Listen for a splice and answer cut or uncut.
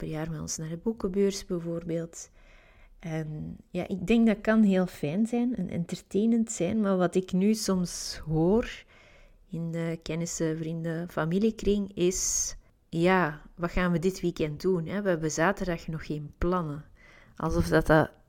uncut